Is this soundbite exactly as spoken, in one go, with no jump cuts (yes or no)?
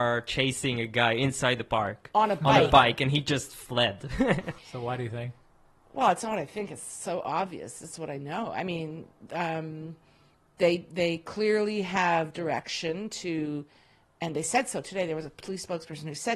no